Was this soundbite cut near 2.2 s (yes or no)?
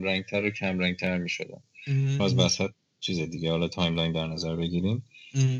yes